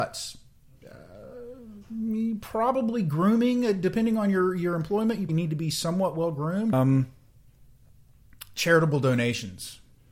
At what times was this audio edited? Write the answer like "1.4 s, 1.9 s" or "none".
5.3 s, 6.7 s

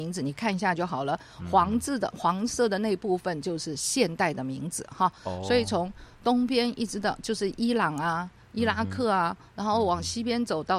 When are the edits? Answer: none

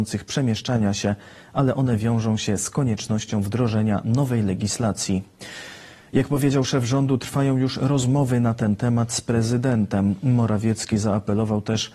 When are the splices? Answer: none

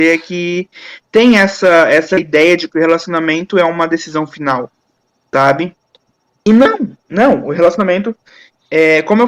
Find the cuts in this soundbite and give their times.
none

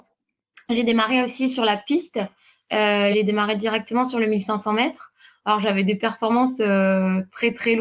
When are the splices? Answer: 3.1 s

